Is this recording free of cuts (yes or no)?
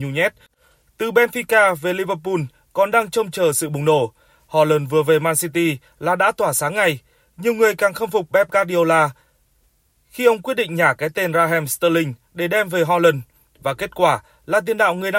yes